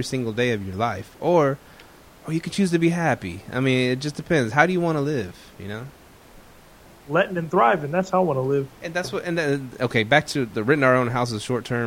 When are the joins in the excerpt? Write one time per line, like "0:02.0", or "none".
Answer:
none